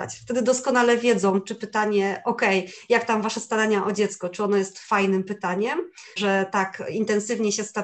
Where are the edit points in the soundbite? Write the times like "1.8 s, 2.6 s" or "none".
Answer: 6.2 s